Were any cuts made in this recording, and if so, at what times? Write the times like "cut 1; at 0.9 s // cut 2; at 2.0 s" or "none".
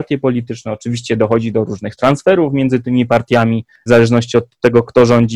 cut 1; at 3.9 s